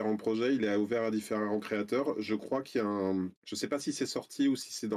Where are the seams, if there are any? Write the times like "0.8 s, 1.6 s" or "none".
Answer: 3.4 s

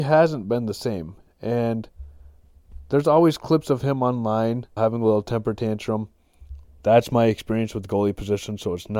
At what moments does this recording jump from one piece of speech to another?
4.8 s, 6.6 s

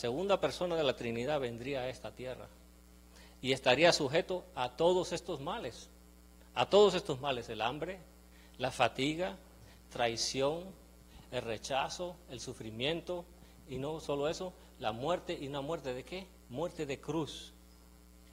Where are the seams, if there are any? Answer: 11.2 s

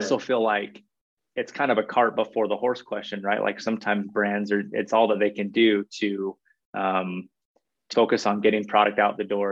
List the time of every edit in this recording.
7.9 s

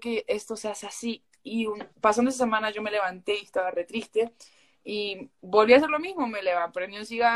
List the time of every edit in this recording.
none

